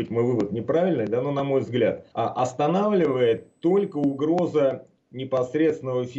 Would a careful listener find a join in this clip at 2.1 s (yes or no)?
yes